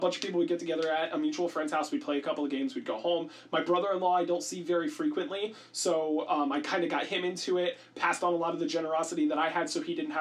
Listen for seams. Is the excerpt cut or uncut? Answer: uncut